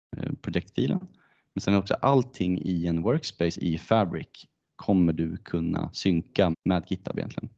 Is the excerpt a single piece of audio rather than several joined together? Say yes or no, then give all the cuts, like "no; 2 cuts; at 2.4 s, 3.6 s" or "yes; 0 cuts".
no; 1 cut; at 6.5 s